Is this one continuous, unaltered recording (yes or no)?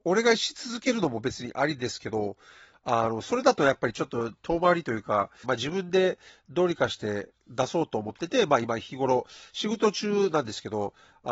no